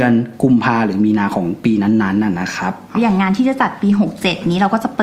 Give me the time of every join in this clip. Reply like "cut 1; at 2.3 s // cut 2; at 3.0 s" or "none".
cut 1; at 2.9 s